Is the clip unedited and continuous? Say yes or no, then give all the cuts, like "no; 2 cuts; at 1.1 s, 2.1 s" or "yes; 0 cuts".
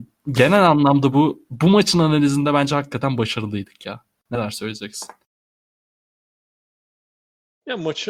yes; 0 cuts